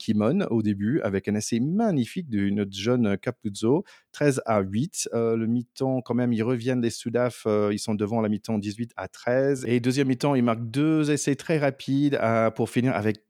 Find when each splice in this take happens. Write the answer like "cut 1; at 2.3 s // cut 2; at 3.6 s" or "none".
none